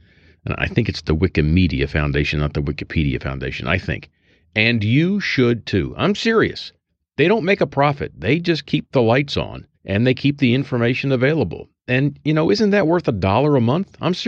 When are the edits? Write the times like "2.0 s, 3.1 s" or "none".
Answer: 9.7 s